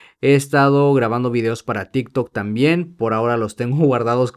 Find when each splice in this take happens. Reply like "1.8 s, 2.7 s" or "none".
none